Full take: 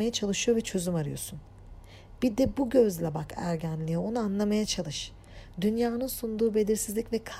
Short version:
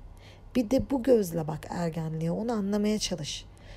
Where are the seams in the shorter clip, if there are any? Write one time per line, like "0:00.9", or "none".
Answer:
none